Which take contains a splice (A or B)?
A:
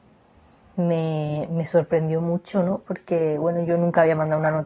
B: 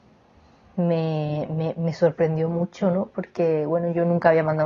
A